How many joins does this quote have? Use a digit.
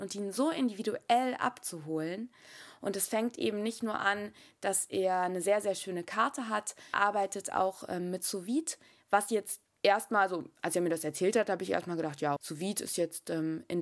2